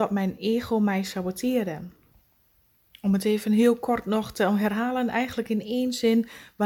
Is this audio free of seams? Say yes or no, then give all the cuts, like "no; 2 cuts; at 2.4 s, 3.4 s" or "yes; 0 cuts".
yes; 0 cuts